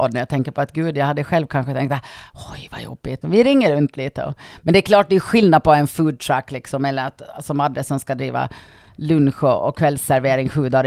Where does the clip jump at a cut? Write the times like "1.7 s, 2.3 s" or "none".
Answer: 3.2 s